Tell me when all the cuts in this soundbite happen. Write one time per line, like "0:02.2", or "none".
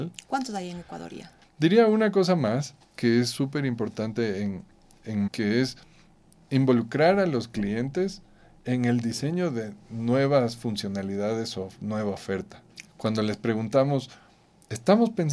0:01.4
0:05.3
0:12.9